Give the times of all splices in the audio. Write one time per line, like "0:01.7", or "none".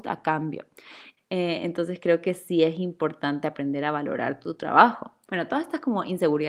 0:01.2
0:05.3